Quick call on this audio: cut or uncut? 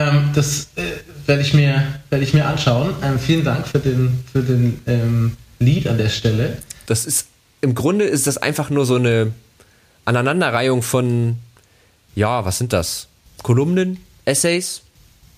cut